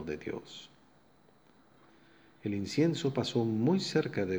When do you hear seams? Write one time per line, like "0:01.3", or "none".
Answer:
none